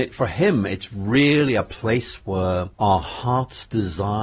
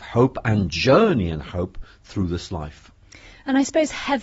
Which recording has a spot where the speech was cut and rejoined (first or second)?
first